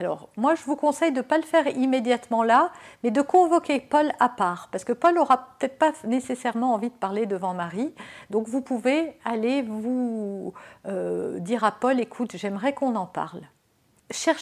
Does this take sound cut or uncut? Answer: uncut